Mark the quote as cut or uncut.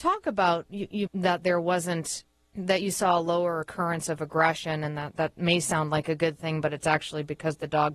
cut